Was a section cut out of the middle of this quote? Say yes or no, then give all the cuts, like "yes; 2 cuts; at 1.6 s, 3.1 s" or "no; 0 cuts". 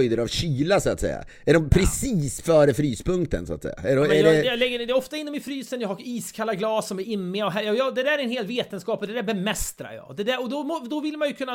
no; 0 cuts